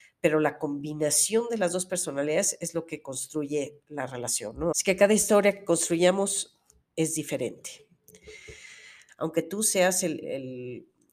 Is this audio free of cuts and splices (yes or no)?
no